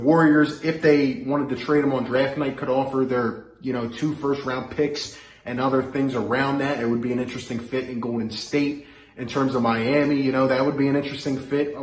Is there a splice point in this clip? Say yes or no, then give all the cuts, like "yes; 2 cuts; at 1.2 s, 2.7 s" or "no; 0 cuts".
no; 0 cuts